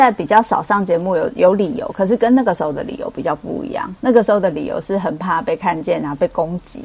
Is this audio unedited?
yes; 0 cuts

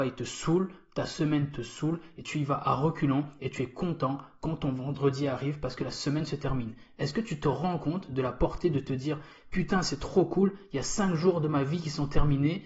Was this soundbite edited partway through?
no; 0 cuts

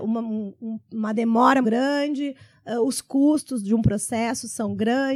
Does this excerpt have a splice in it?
yes; 1 cut; at 1.6 s

